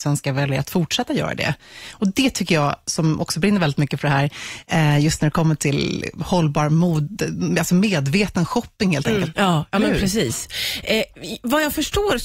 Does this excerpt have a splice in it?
yes; 1 cut; at 9.3 s

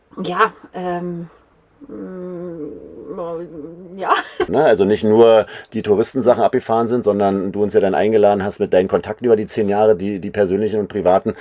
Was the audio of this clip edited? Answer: yes; 1 cut; at 4.5 s

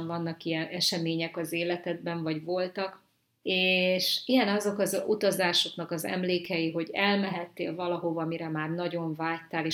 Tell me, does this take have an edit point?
yes; 1 cut; at 3.4 s

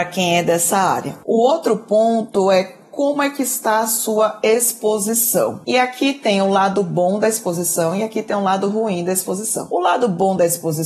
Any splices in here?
no; 0 cuts

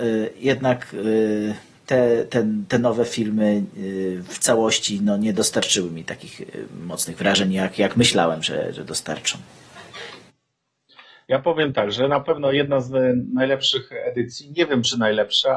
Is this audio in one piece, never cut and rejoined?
yes; 0 cuts

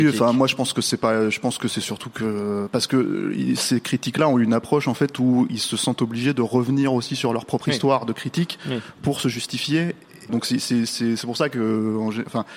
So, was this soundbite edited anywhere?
yes; 1 cut; at 10.3 s

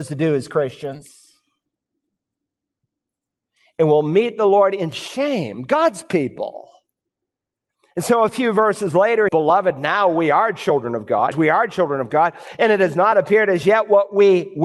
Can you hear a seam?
yes; 2 cuts; at 9.3 s, 11.3 s

